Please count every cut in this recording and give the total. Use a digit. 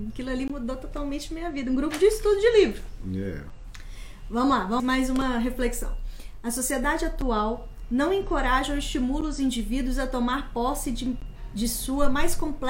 1